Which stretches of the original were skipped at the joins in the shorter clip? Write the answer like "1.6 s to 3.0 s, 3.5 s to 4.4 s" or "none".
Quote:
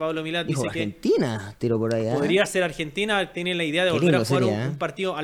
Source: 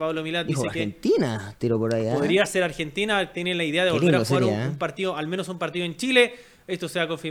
none